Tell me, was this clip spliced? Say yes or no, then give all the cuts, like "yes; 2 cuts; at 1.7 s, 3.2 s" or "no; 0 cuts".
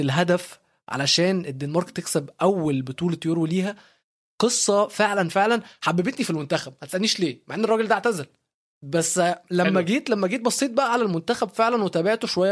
no; 0 cuts